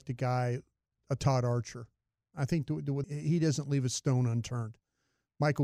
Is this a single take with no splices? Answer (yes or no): no